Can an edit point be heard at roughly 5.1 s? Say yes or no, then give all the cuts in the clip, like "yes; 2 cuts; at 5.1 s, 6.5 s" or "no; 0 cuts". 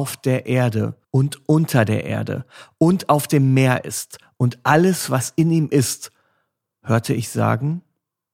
no; 1 cut; at 1.0 s